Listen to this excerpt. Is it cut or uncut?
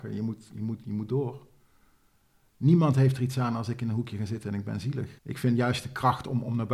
cut